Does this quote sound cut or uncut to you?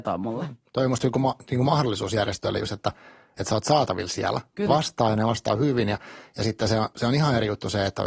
cut